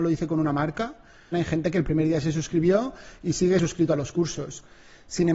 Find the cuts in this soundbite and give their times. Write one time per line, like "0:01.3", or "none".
0:01.3

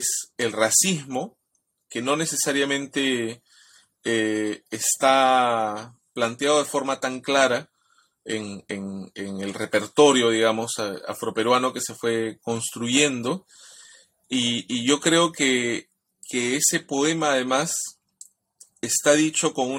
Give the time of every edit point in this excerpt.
none

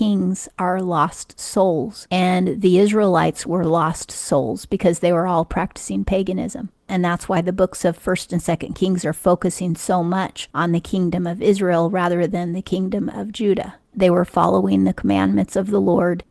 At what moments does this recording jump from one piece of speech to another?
0:13.9

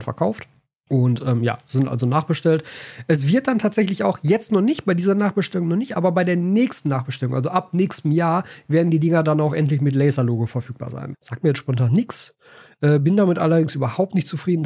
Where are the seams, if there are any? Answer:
0:11.1

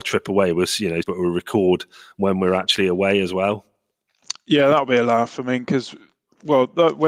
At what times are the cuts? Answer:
0:01.0

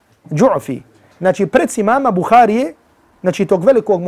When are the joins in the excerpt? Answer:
0:01.1

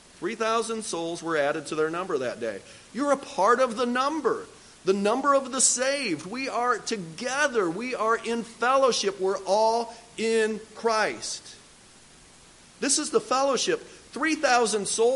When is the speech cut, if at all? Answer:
0:12.6

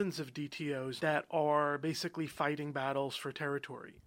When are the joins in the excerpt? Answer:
0:01.0

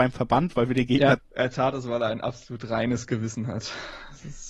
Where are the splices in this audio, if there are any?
0:01.2

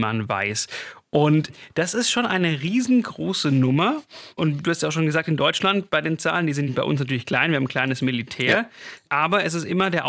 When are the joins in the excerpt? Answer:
none

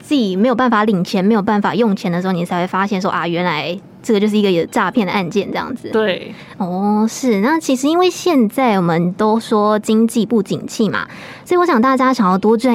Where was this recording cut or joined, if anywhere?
none

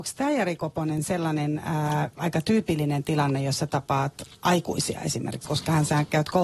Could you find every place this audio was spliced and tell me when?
0:05.4

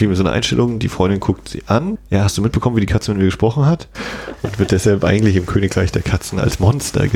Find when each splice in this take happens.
0:01.9
0:03.9

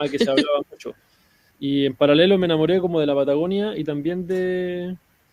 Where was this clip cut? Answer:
0:01.5

